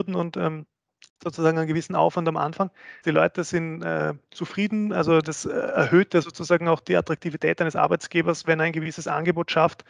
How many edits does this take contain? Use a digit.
1